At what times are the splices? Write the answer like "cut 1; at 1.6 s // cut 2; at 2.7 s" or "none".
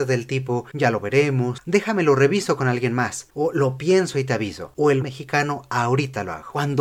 cut 1; at 1.6 s // cut 2; at 5.0 s